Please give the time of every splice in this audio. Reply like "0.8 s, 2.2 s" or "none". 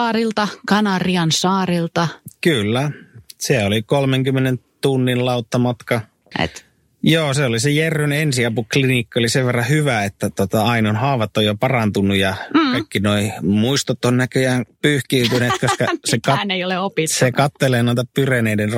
6.3 s